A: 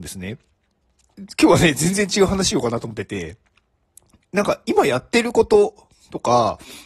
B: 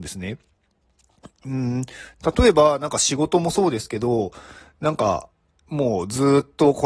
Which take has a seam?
A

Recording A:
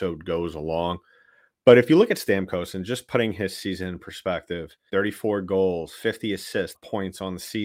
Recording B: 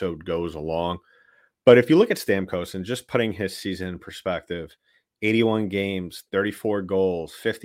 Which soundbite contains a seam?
A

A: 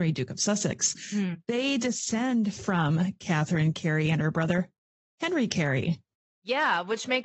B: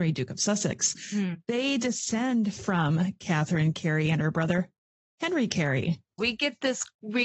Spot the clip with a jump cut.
B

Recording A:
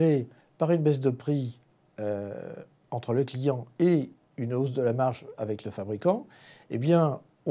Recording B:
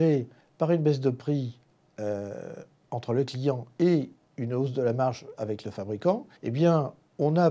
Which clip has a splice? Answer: B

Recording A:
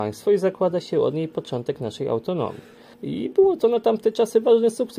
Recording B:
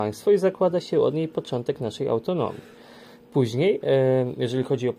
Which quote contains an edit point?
A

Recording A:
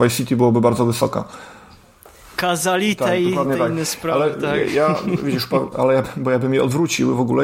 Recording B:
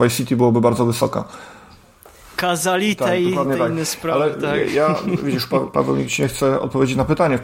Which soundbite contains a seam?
A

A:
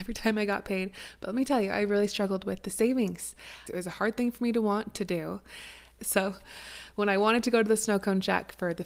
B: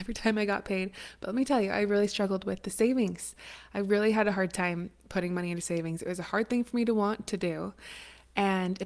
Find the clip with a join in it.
A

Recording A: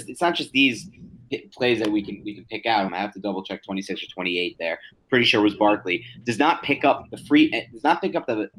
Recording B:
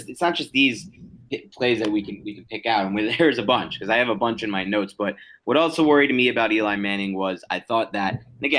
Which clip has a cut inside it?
A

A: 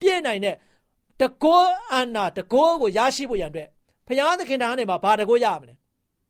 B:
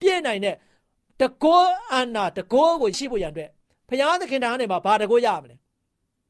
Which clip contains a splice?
B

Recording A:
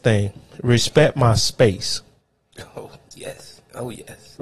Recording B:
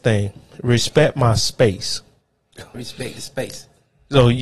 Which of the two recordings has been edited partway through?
B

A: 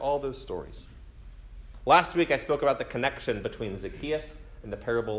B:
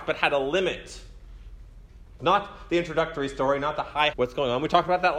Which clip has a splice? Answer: B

